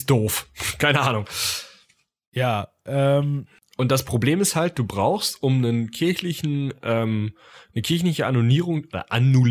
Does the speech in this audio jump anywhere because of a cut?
no; 0 cuts

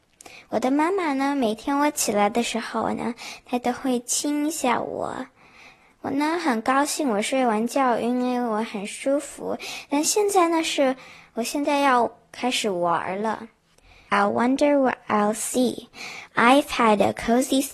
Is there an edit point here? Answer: yes; 2 cuts; at 14.1 s, 16.3 s

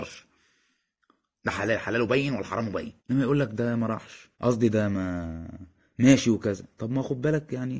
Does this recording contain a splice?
yes; 2 cuts; at 3.0 s, 4.3 s

